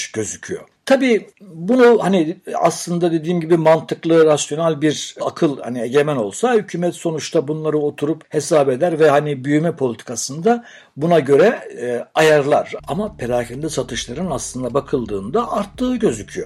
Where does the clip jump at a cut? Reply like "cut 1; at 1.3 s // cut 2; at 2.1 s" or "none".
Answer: cut 1; at 5.2 s // cut 2; at 12.8 s